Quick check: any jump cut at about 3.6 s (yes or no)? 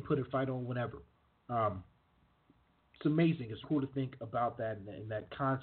yes